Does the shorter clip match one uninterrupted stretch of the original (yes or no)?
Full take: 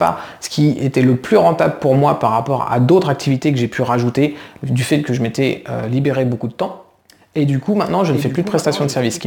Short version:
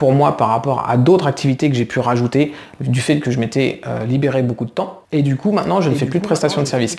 no